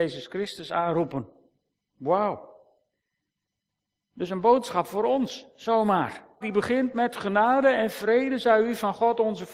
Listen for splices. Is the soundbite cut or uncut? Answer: cut